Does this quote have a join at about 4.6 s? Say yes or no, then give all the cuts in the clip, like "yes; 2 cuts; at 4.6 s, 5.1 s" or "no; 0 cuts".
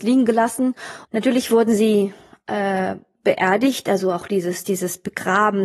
yes; 2 cuts; at 1.0 s, 4.6 s